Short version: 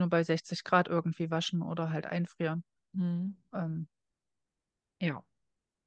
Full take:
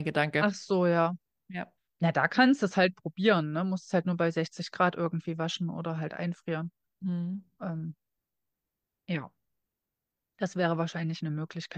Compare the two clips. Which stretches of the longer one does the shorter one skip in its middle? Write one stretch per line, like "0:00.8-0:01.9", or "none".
none